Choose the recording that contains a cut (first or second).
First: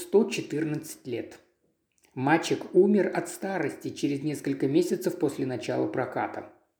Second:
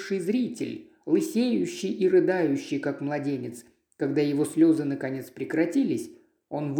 second